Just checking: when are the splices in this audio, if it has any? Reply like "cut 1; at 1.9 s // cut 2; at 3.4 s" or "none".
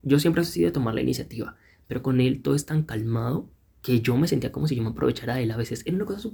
none